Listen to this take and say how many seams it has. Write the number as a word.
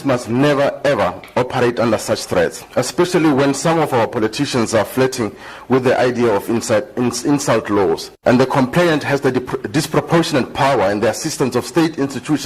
one